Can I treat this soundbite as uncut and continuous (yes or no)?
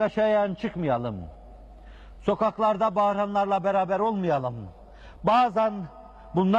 yes